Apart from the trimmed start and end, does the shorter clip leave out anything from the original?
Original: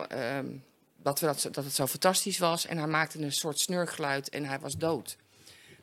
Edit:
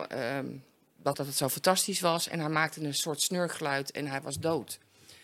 yes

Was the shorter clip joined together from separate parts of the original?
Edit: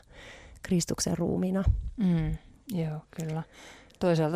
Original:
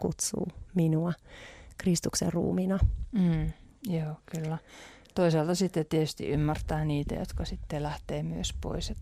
no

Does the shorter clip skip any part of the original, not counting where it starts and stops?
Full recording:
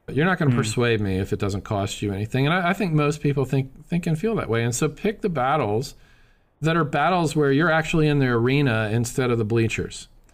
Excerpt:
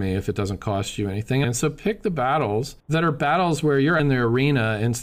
yes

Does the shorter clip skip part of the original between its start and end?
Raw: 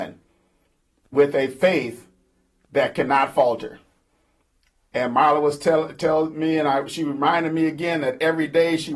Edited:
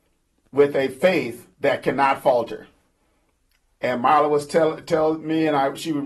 yes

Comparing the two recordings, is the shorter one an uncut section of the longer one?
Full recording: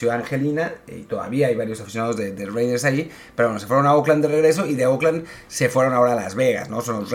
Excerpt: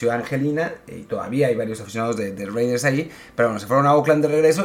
yes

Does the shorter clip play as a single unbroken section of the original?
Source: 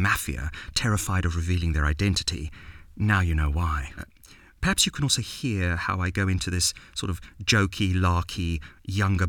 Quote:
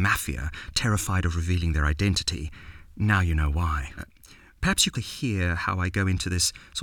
no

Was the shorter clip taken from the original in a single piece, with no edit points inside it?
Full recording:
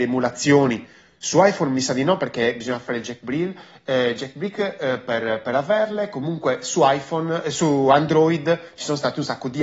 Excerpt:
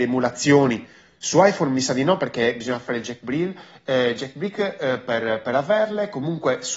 yes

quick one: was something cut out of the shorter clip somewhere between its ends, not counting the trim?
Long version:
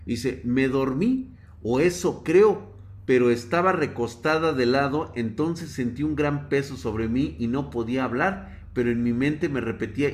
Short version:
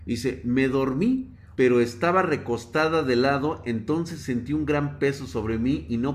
yes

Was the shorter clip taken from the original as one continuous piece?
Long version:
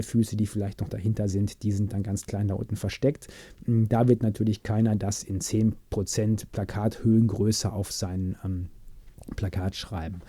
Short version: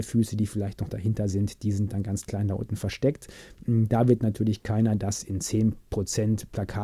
yes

